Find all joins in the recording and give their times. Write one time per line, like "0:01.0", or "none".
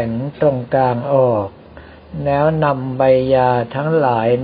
none